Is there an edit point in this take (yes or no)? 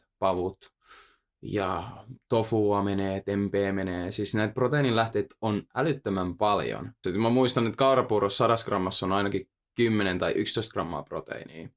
yes